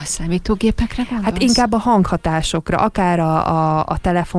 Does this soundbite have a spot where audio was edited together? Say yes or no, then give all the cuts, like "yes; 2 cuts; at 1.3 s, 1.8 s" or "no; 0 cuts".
no; 0 cuts